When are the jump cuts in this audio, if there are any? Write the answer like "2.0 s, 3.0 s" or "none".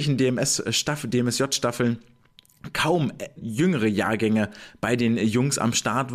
3.4 s